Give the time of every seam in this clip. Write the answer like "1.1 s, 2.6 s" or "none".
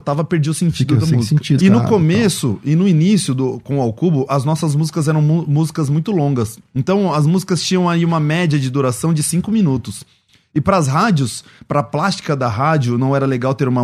1.6 s